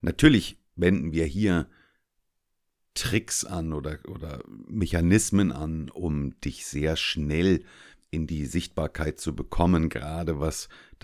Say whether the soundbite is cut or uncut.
uncut